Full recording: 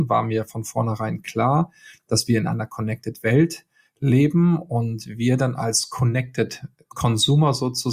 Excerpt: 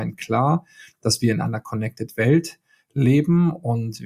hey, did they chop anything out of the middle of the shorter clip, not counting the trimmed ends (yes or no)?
no